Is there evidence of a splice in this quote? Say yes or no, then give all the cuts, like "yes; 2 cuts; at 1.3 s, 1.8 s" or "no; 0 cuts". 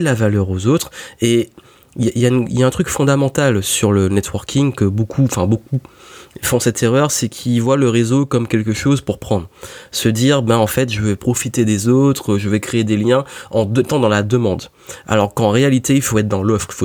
no; 0 cuts